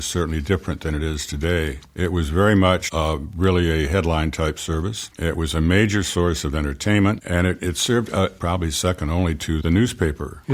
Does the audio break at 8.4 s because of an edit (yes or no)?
yes